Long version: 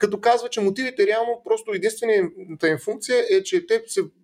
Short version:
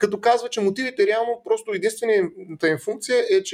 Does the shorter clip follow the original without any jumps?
yes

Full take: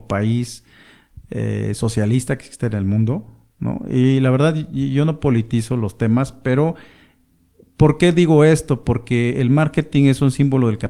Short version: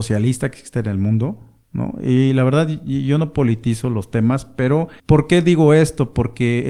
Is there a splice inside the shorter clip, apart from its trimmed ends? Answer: yes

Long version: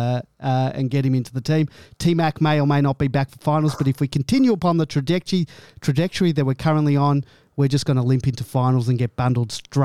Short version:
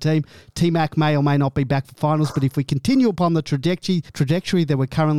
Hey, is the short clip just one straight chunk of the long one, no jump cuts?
no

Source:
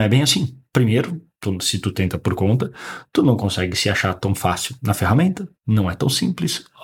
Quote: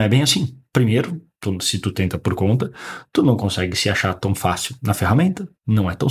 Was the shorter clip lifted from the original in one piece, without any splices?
yes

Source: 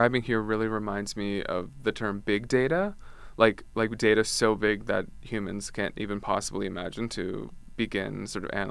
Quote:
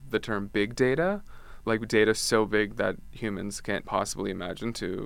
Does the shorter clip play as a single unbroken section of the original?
no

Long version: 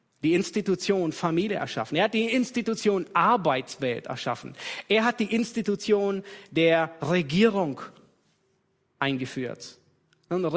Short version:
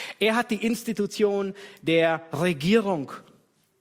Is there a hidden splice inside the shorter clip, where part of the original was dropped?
no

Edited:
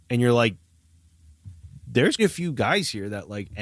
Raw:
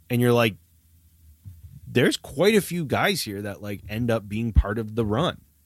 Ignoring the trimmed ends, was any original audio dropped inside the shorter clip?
yes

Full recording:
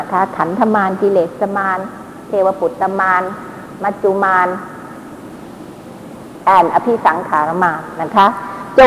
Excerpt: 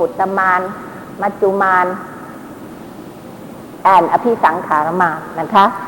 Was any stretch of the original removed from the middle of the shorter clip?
no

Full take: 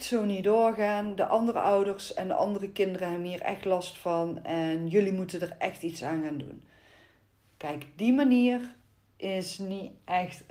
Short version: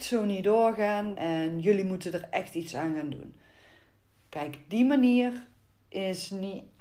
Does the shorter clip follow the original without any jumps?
no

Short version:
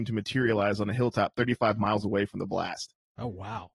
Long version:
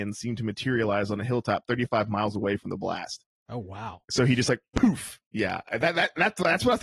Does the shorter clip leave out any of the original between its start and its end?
no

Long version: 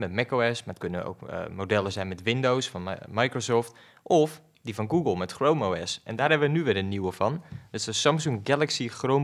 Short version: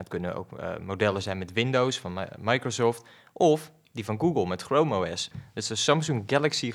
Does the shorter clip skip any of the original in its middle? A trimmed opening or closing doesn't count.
yes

